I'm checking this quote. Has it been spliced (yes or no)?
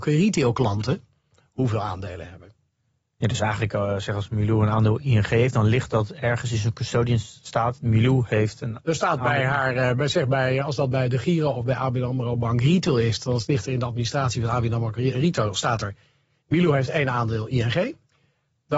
no